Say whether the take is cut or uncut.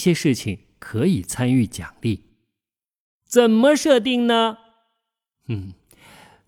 uncut